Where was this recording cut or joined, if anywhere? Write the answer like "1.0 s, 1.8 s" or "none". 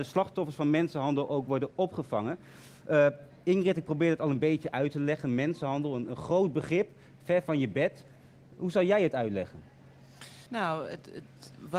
10.5 s